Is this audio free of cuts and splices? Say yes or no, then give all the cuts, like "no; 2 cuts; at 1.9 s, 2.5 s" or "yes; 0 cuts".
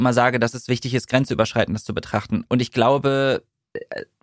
no; 1 cut; at 2.4 s